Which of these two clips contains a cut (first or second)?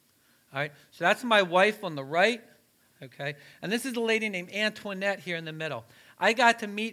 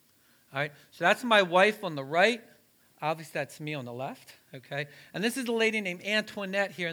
first